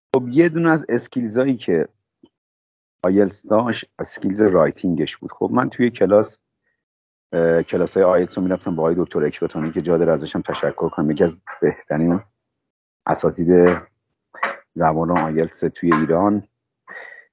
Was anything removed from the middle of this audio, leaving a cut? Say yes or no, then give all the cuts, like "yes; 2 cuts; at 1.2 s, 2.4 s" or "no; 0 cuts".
no; 0 cuts